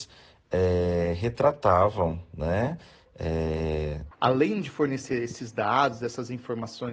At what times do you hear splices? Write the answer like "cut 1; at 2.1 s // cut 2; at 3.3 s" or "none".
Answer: cut 1; at 4.1 s

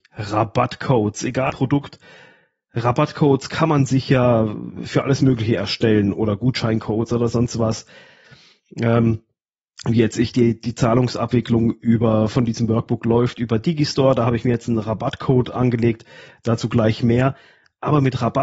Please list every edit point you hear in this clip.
cut 1; at 1.5 s

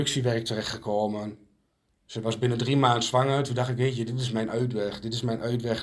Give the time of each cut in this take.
cut 1; at 1.9 s

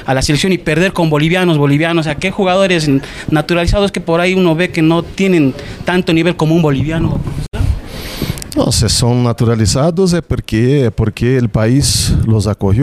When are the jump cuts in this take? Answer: none

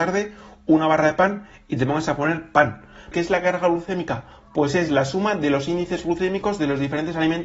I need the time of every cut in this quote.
cut 1; at 3.1 s

